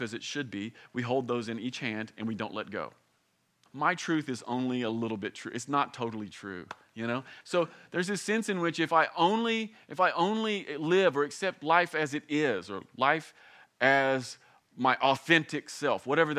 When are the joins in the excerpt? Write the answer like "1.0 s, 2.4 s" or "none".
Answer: 3.7 s, 7.4 s